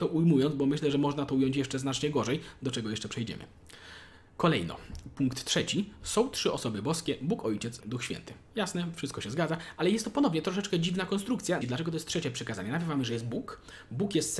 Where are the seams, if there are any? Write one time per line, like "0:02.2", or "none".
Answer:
0:07.8
0:11.6